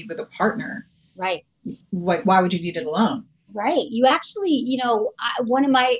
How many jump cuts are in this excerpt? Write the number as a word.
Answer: zero